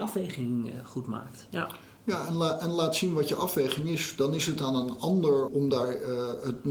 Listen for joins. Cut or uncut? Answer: cut